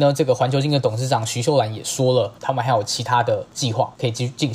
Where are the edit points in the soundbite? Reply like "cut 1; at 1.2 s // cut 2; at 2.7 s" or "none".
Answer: cut 1; at 2.4 s